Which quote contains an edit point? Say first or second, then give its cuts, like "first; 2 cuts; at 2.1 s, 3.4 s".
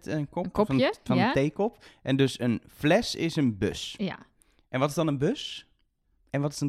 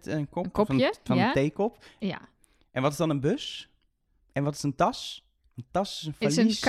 second; 1 cut; at 2.0 s